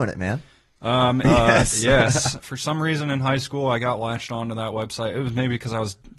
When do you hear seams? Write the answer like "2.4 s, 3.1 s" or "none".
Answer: 1.2 s, 2.4 s